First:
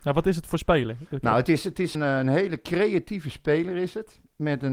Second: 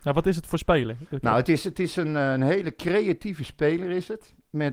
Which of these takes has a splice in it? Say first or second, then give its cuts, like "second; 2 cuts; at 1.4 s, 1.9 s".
first; 1 cut; at 1.9 s